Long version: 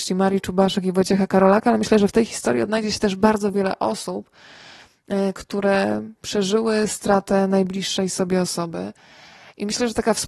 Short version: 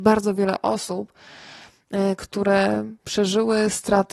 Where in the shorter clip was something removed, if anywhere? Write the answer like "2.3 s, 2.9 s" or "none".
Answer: none